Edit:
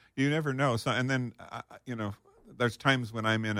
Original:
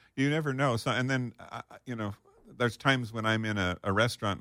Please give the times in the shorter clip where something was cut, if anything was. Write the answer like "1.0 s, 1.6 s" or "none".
none